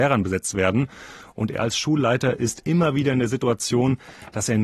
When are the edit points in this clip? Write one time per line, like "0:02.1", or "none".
none